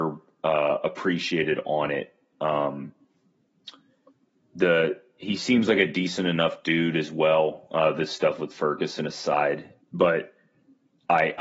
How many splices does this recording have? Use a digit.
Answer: 1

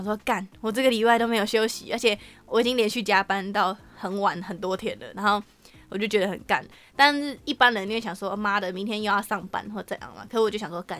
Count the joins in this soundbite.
0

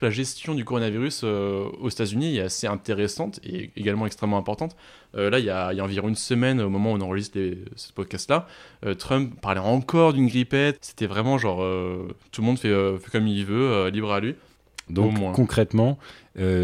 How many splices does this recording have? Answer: 2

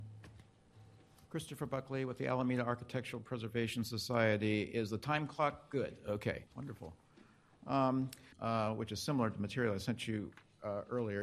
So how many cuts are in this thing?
2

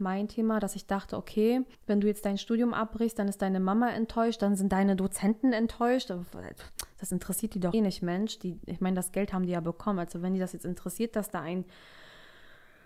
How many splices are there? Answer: 2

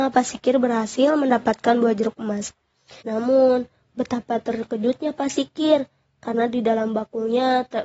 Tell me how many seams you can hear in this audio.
1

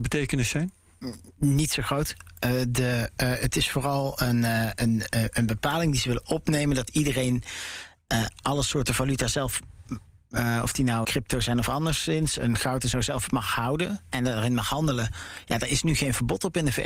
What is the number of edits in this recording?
1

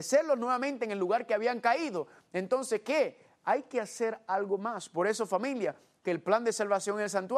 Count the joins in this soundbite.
0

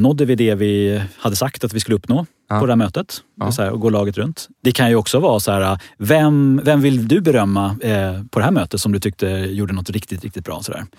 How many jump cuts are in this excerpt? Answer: 0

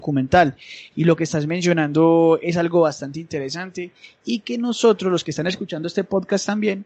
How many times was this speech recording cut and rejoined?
1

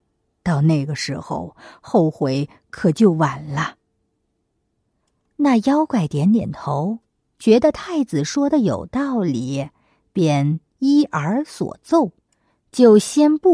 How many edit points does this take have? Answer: 0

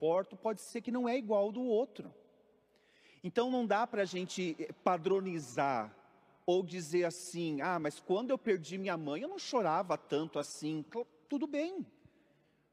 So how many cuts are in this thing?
0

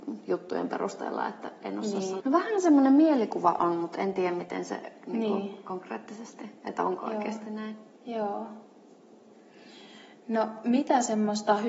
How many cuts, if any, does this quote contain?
1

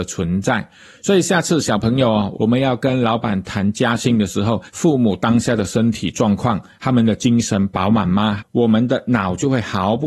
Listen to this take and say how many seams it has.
3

